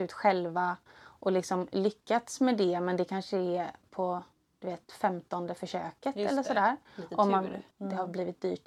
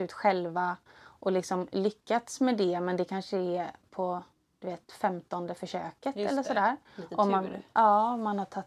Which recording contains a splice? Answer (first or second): first